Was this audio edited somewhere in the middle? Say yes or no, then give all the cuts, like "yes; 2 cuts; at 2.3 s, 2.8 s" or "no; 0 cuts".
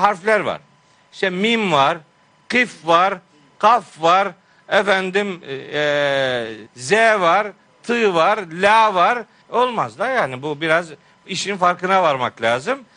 yes; 2 cuts; at 6.7 s, 9.4 s